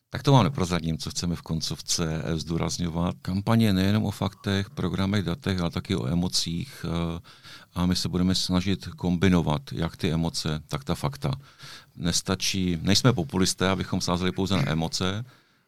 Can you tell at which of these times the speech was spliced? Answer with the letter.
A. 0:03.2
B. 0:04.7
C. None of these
A